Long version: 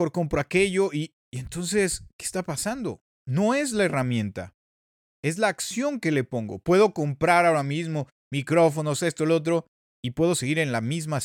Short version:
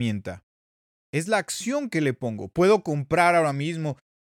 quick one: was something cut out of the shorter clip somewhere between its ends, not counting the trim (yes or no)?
no